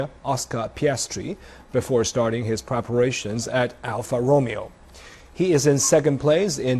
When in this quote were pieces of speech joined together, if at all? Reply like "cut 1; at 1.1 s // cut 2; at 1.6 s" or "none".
none